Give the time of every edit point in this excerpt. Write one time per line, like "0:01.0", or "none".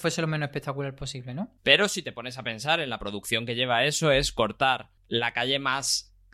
0:01.6
0:05.0